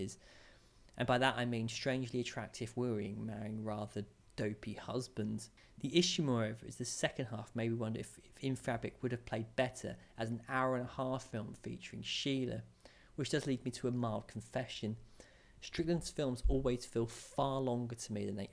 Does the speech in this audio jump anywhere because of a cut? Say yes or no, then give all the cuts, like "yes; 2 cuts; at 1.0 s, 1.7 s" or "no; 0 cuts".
no; 0 cuts